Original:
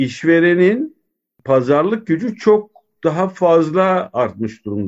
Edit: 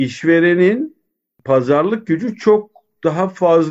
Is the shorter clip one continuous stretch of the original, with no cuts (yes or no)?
yes